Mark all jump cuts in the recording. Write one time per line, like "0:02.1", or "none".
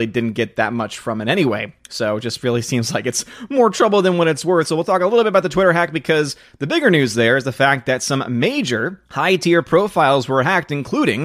0:09.0